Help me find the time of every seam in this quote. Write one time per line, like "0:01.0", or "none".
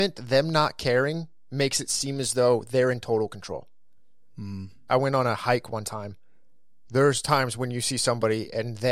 0:04.9
0:06.8